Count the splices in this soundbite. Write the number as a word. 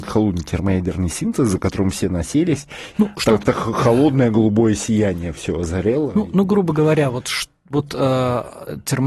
one